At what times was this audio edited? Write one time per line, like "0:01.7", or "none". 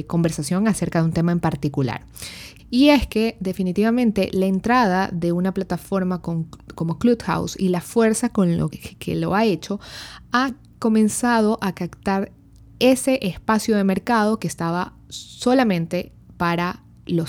0:02.6
0:08.7